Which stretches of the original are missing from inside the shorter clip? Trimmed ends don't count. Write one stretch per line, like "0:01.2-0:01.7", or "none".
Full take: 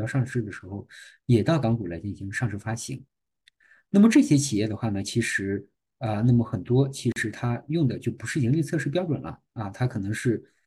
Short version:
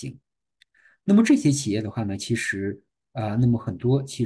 none